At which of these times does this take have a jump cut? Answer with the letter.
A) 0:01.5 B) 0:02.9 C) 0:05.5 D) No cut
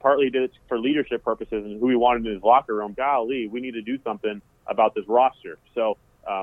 B